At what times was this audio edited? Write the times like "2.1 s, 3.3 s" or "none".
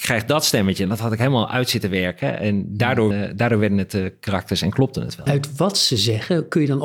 3.1 s, 5.3 s

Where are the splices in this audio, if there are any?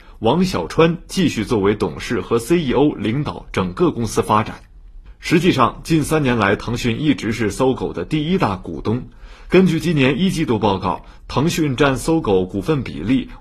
none

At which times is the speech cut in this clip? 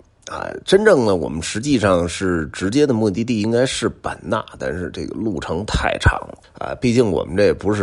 6.4 s

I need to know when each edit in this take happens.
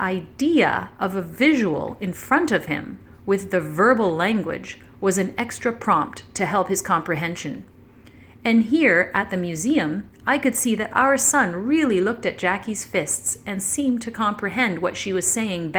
none

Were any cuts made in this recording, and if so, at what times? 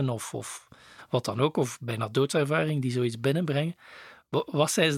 none

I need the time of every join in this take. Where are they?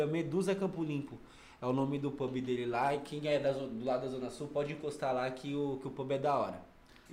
none

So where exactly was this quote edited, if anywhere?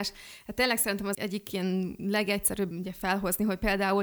1.1 s, 2.7 s

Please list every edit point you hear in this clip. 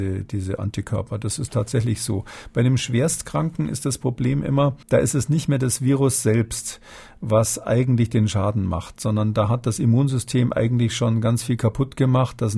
4.8 s

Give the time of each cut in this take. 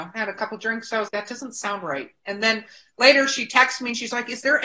1.1 s

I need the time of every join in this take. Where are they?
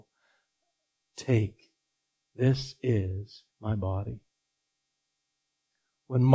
1.0 s, 3.5 s

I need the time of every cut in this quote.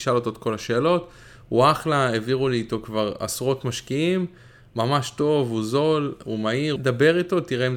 6.8 s

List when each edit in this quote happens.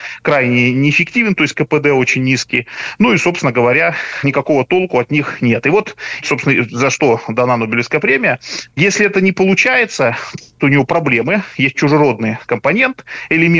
8.7 s, 10.4 s

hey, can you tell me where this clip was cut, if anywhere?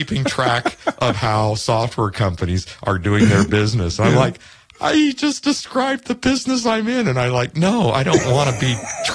none

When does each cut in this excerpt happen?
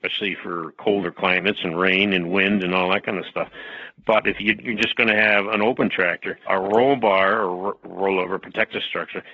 6.5 s

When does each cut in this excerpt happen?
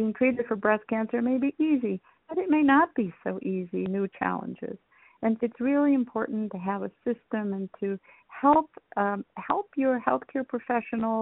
5.4 s

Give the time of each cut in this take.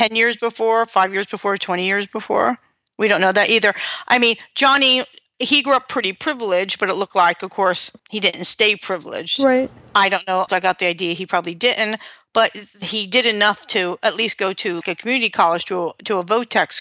10.5 s, 14.8 s

